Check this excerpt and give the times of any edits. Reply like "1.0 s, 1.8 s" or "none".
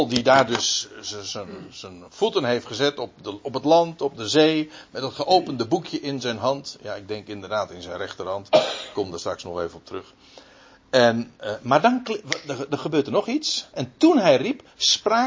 13.7 s